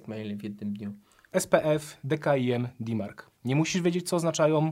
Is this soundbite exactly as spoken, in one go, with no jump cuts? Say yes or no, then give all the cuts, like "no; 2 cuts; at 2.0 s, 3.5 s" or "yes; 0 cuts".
yes; 0 cuts